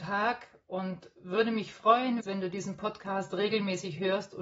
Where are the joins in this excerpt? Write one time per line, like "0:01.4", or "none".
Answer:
0:02.2